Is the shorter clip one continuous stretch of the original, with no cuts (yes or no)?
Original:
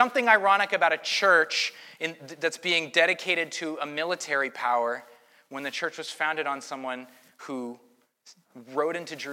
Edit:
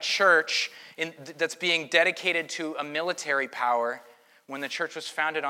yes